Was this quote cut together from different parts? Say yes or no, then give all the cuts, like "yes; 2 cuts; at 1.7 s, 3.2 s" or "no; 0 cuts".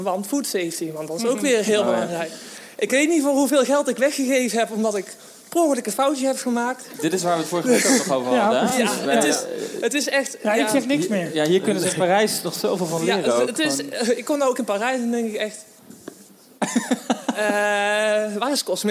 no; 0 cuts